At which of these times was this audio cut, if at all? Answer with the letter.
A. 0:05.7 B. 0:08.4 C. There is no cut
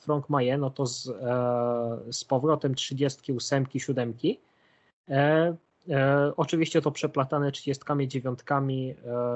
A